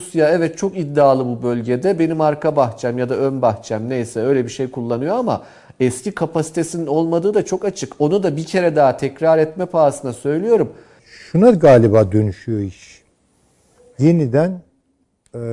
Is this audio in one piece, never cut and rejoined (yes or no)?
no